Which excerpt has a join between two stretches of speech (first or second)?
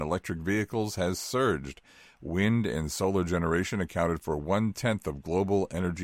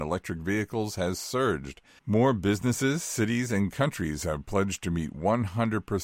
second